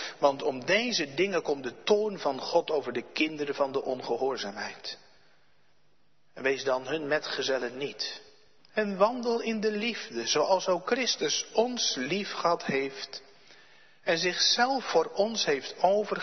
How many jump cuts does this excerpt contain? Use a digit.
1